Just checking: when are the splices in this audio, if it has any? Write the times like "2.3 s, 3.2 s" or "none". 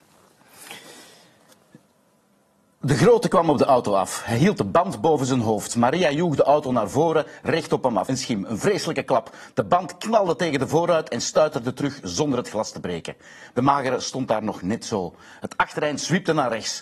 8.1 s, 13.5 s